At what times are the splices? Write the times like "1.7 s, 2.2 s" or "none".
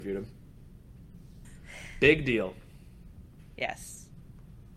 1.4 s